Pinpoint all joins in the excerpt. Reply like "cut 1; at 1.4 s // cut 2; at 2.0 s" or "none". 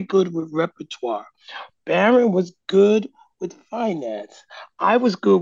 none